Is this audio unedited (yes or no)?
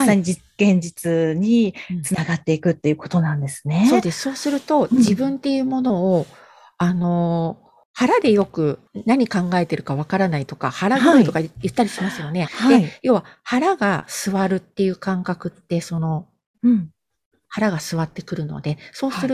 no